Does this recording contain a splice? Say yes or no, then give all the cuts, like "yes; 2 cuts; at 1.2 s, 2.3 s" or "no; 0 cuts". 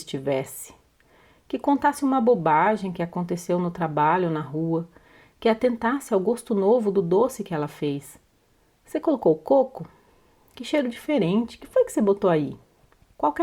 no; 0 cuts